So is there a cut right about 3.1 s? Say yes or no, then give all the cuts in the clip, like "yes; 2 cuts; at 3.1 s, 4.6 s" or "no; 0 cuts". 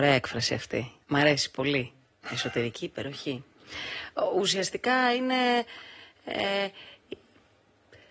no; 1 cut; at 1.0 s